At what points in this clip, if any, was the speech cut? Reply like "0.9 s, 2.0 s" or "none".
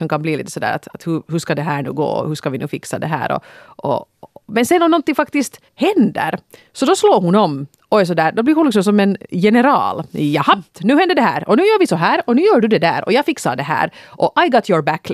5.7 s

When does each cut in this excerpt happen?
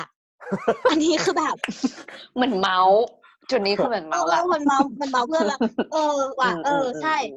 none

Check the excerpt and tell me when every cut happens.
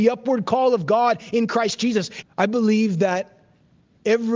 2.2 s

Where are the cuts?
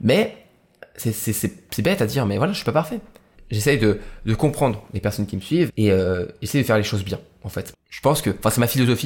3.3 s, 5.7 s, 7.7 s

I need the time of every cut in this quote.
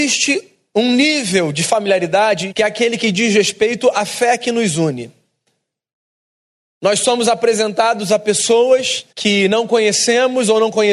2.5 s, 9.1 s

